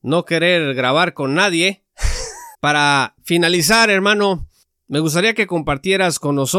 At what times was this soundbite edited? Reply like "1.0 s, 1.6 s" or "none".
2.5 s